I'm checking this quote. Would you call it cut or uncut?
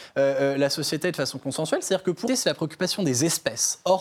cut